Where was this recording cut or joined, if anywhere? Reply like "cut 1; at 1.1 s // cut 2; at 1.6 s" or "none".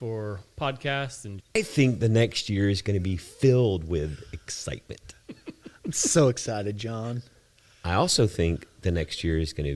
cut 1; at 1.4 s